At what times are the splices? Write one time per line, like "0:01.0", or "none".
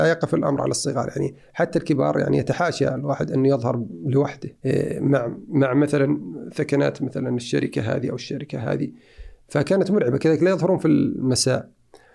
0:04.6